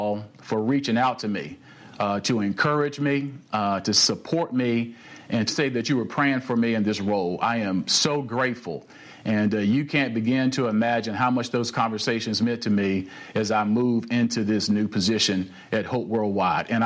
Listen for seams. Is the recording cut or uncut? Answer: cut